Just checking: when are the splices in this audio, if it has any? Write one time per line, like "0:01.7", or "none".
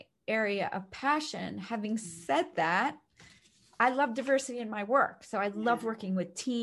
none